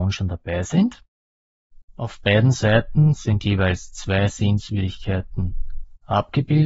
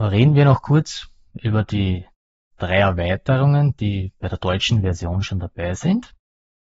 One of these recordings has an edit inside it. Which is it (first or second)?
first